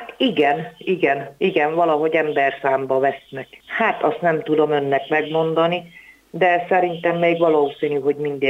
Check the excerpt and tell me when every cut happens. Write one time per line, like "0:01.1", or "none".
0:03.6